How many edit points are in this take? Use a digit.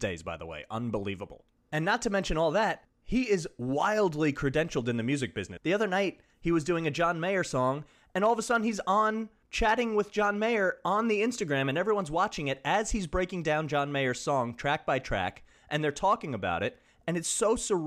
1